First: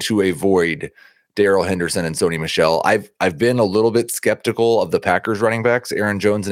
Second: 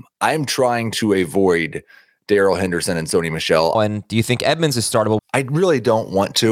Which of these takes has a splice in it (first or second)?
second